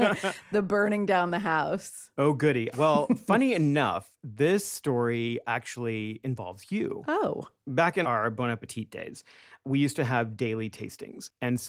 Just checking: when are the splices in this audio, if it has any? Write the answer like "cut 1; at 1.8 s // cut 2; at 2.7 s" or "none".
cut 1; at 2.7 s // cut 2; at 8.0 s